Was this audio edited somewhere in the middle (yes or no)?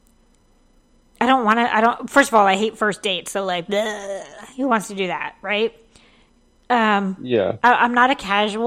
no